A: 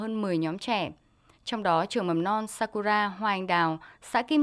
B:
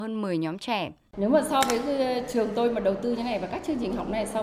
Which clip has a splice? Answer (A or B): B